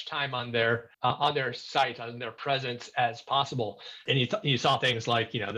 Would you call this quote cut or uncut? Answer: cut